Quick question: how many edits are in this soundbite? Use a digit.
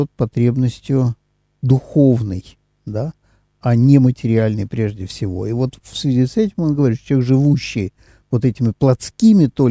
0